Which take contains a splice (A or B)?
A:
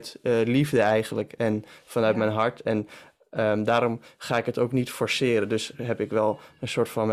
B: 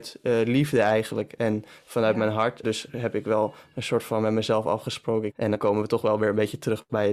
B